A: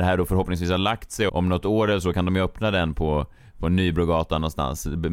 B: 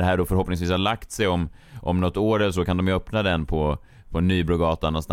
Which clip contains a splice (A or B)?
A